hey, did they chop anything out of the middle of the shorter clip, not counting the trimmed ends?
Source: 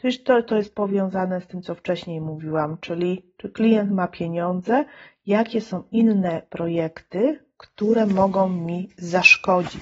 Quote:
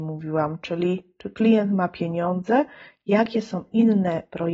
no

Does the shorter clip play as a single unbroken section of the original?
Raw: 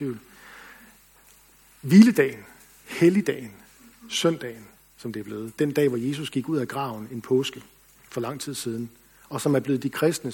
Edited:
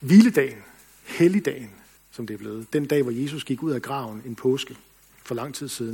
no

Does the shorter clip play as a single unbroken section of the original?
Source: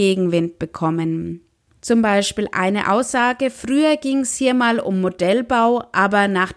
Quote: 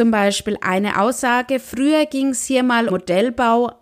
no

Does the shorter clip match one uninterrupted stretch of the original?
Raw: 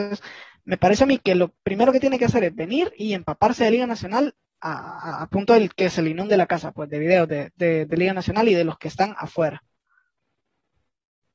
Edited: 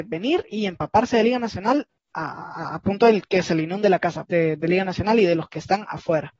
no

